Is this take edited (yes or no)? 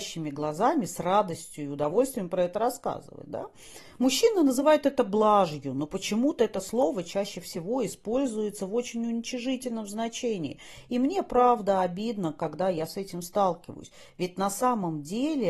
no